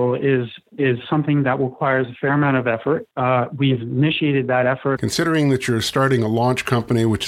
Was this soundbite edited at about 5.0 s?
yes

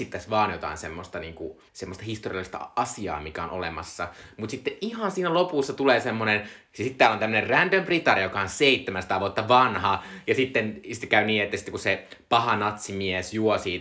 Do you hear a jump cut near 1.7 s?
yes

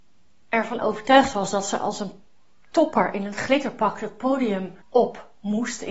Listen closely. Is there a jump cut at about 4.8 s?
yes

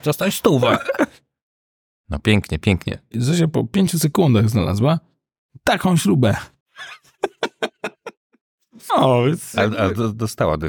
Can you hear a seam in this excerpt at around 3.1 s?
yes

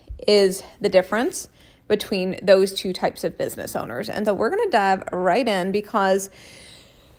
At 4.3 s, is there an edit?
yes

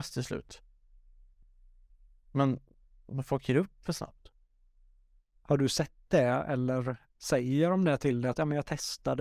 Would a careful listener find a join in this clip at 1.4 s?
no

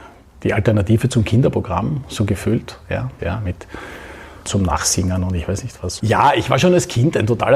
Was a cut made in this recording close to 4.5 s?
yes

